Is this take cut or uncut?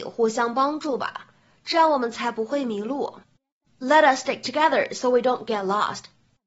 uncut